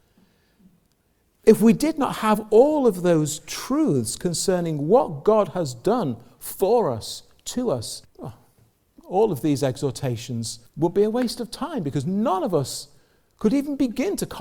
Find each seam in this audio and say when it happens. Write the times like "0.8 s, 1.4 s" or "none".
8.0 s, 10.7 s